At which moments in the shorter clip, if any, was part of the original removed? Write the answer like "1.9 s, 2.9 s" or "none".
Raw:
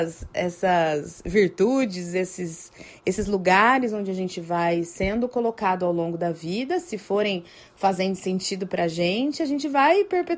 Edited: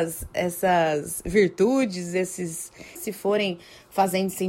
3.0 s